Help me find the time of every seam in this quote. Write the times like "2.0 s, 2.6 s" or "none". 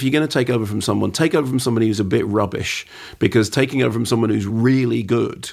none

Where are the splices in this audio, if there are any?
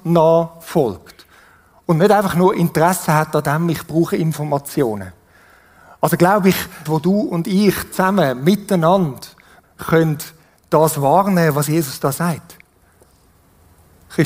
6.9 s, 9.6 s

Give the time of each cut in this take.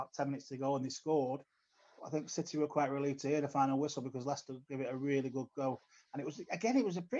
2.0 s

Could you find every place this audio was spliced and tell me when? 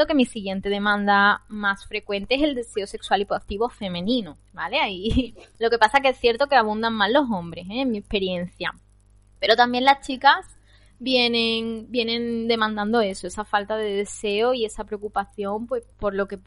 none

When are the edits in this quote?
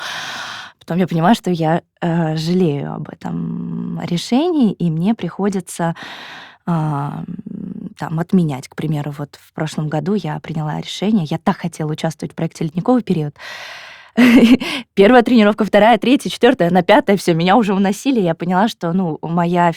none

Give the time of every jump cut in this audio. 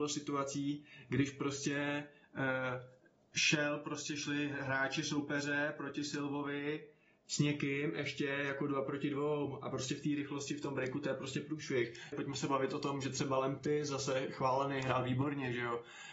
12.1 s

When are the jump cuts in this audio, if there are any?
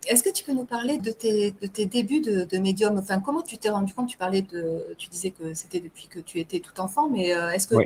1.0 s

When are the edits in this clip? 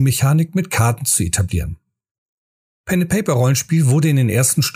2.7 s

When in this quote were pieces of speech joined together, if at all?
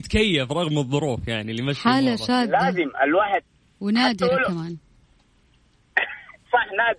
none

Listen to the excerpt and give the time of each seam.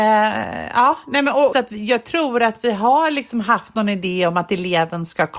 1.5 s

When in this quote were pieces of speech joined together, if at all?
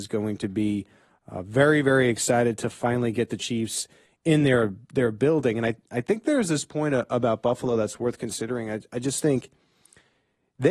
none

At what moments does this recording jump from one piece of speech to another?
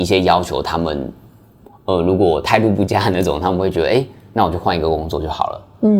none

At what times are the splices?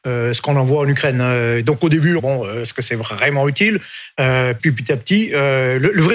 2.2 s, 4.6 s

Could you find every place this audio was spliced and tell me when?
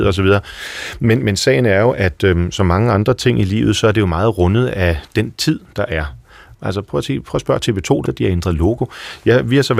6.5 s, 8.0 s

